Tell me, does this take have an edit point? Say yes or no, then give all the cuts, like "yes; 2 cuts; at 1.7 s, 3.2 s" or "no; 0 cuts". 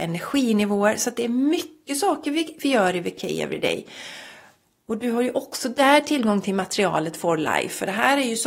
no; 0 cuts